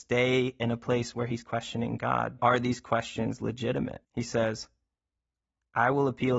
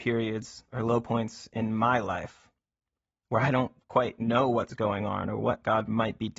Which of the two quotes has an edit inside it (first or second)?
first